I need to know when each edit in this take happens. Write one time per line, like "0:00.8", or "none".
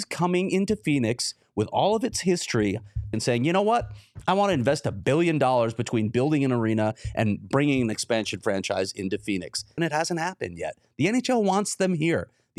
0:03.1
0:09.8

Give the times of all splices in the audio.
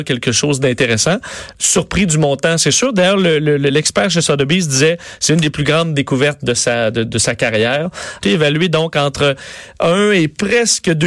0:08.2

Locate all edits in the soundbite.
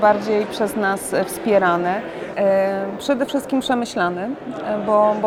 0:02.3

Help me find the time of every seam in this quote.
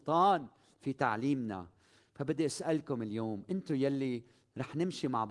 none

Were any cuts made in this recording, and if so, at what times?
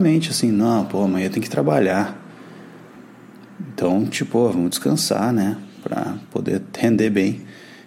none

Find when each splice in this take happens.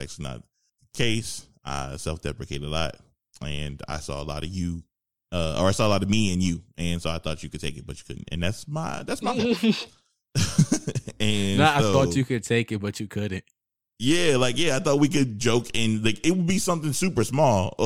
none

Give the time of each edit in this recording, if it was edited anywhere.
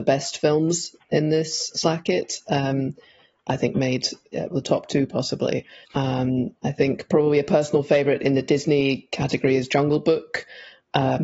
0:03.4
0:04.5
0:05.8

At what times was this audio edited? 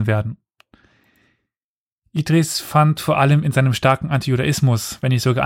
none

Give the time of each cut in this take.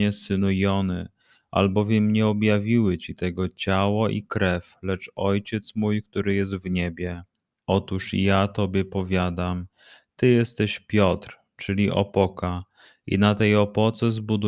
none

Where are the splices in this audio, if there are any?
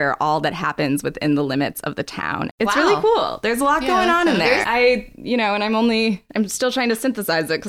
0:02.5
0:04.6

